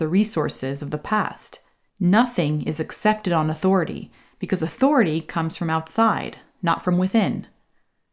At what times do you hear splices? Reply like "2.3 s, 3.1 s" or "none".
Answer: 1.9 s